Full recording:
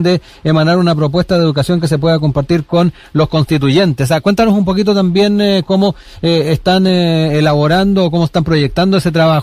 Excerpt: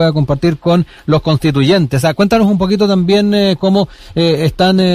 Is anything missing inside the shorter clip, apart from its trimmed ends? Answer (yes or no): no